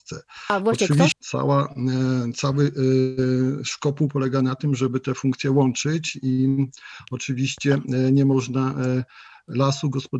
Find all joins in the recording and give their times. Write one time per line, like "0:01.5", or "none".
0:01.1